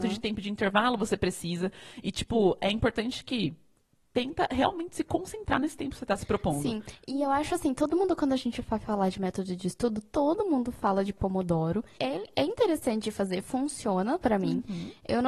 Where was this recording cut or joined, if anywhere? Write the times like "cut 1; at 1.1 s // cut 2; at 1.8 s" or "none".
cut 1; at 12.0 s